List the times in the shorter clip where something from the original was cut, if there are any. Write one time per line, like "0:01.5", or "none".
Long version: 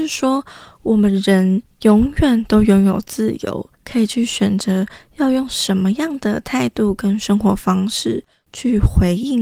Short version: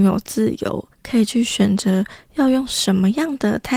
none